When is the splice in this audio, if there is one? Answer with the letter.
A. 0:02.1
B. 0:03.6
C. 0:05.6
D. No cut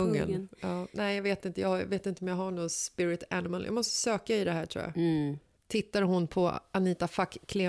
C